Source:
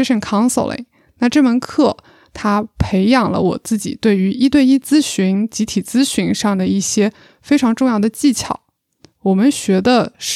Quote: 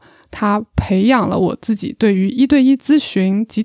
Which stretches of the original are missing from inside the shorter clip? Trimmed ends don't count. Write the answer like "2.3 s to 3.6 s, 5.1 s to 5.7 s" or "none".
none